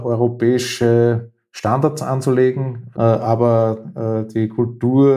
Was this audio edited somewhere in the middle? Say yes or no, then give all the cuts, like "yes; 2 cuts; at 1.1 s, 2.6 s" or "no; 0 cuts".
yes; 1 cut; at 2.9 s